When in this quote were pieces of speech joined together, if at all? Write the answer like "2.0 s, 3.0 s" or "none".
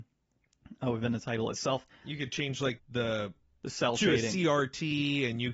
2.8 s